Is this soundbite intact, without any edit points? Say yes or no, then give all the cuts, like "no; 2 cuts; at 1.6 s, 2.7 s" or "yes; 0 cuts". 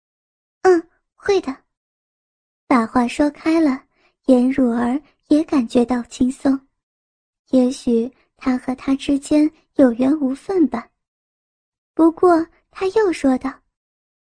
yes; 0 cuts